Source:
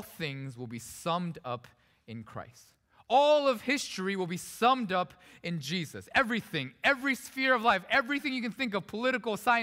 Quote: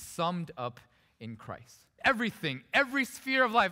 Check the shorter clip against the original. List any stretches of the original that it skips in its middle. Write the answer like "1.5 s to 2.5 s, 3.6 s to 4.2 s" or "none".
2.9 s to 6.1 s